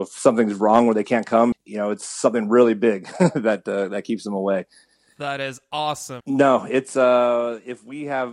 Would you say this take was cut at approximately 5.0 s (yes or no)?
no